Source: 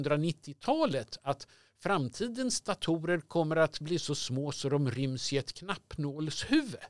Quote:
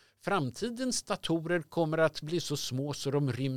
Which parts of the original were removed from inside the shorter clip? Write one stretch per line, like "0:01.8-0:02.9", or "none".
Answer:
none